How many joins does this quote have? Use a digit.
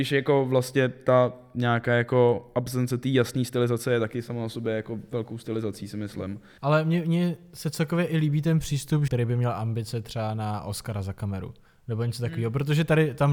2